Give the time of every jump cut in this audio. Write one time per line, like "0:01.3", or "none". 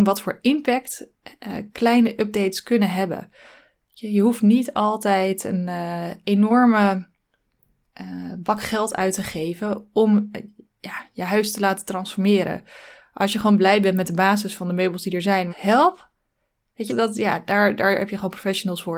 0:01.7
0:15.5
0:16.9